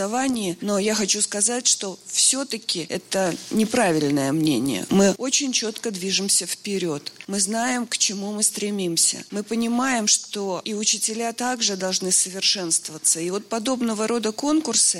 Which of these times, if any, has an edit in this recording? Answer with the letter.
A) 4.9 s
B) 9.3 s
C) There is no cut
C